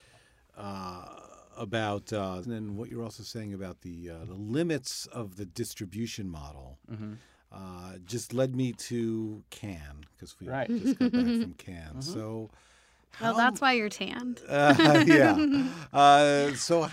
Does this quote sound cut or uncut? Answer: cut